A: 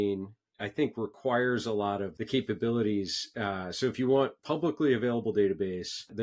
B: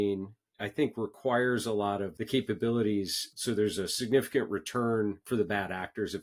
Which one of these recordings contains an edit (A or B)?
B